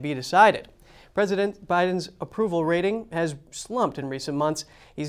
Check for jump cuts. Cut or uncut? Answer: uncut